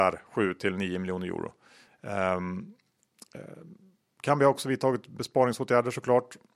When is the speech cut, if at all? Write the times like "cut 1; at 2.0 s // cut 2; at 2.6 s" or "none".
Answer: cut 1; at 1.9 s